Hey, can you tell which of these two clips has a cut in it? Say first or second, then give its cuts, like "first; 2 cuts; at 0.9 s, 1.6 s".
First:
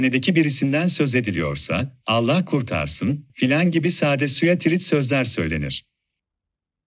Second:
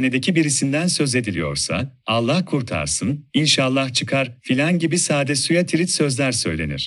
first; 1 cut; at 3.3 s